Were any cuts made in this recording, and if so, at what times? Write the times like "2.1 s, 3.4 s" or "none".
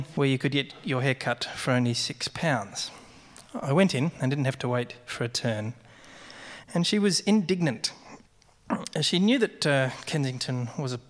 6.6 s